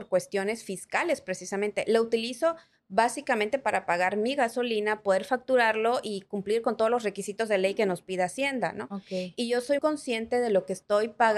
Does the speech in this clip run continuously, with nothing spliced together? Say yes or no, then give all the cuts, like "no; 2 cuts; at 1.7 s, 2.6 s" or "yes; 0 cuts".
no; 1 cut; at 9.8 s